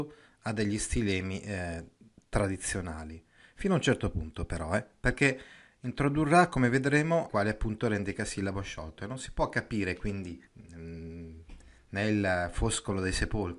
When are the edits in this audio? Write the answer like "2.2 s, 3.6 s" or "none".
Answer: 7.3 s, 10.5 s